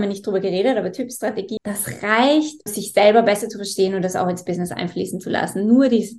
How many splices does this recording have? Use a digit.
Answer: 2